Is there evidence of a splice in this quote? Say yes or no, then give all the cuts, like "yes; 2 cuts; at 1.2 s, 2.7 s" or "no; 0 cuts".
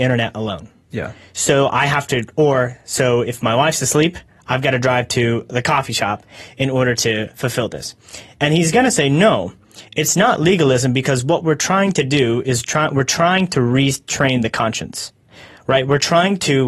yes; 1 cut; at 8.3 s